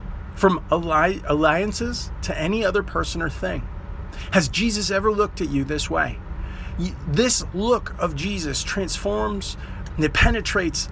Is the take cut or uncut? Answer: uncut